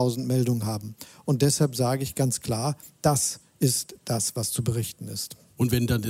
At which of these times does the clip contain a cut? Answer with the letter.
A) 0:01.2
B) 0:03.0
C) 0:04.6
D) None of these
A